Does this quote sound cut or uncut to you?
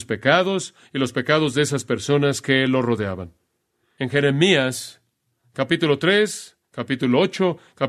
uncut